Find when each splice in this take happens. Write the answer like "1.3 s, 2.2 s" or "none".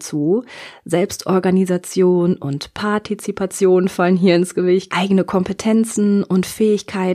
4.9 s